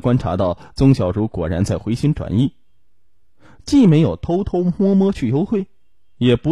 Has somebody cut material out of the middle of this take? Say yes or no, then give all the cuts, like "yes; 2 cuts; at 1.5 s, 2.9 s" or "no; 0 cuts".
no; 0 cuts